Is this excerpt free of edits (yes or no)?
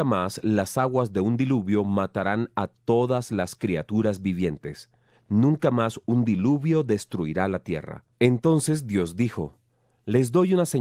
no